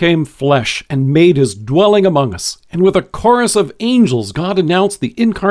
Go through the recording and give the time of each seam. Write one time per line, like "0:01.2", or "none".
none